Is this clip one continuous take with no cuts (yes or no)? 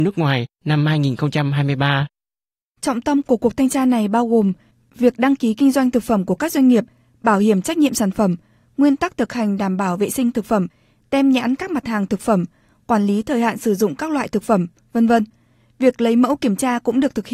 yes